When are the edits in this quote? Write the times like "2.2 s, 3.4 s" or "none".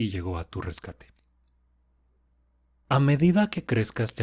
none

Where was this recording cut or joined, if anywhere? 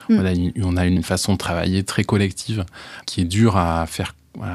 1.0 s, 3.0 s

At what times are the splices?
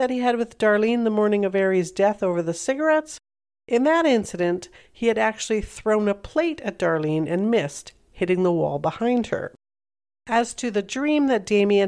none

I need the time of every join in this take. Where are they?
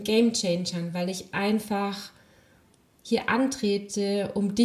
none

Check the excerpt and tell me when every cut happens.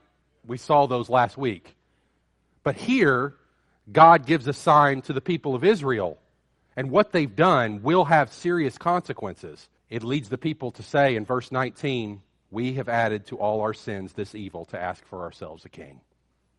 6.6 s, 9.8 s

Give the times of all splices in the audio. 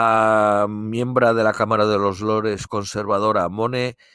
none

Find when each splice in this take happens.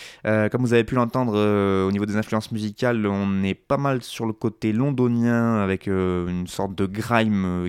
none

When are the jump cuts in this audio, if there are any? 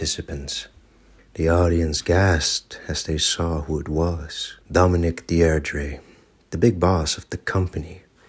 1.2 s, 4.6 s

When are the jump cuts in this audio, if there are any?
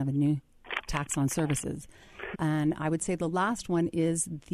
2.3 s

